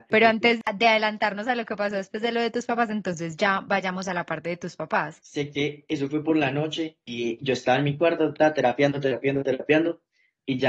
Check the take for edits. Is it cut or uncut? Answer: cut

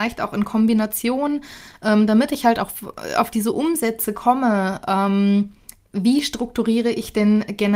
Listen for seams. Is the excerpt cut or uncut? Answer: uncut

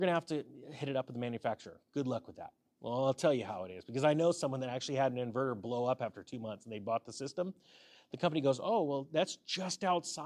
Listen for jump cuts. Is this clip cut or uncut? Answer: cut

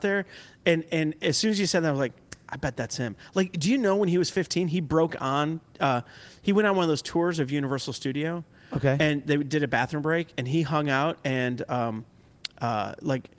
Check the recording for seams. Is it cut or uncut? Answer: uncut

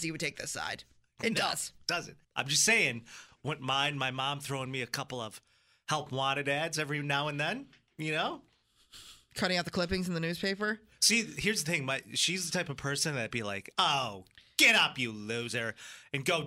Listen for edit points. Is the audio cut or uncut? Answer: cut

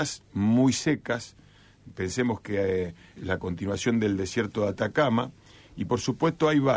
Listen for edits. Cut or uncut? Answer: cut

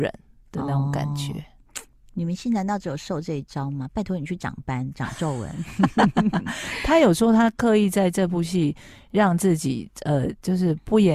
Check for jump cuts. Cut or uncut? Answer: uncut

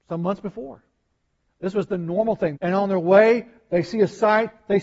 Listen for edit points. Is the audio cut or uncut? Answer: cut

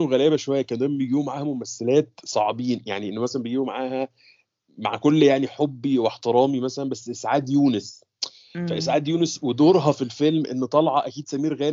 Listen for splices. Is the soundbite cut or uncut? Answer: uncut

